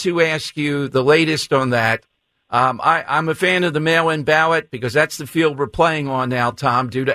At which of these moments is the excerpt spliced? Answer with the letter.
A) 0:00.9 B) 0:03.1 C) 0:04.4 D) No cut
D